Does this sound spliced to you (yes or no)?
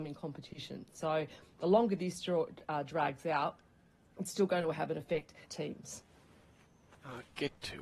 yes